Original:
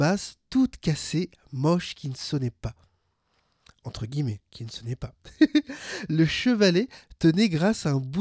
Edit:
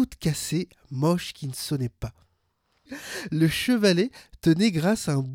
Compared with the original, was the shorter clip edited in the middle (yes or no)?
yes